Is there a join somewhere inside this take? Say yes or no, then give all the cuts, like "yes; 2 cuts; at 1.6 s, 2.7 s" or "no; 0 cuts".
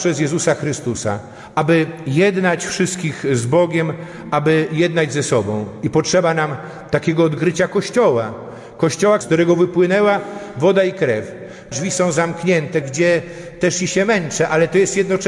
yes; 3 cuts; at 9.2 s, 11.7 s, 12.8 s